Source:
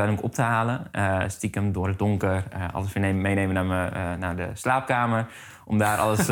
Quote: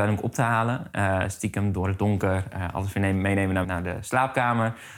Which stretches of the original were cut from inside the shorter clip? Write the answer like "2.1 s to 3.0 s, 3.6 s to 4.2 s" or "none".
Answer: 3.6 s to 4.2 s